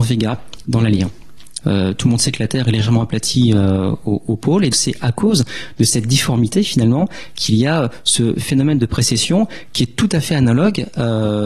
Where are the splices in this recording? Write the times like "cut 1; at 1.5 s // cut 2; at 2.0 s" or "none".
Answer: cut 1; at 1.6 s // cut 2; at 4.7 s